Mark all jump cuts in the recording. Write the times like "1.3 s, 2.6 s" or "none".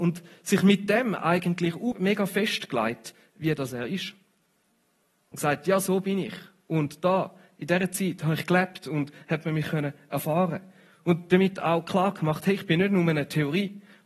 1.9 s